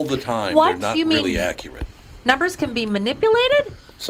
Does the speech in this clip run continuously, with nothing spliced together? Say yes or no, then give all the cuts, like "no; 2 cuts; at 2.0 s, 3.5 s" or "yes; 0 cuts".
yes; 0 cuts